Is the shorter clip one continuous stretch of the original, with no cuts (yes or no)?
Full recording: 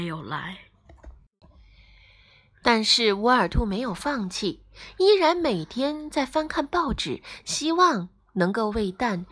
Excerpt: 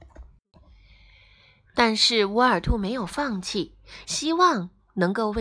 no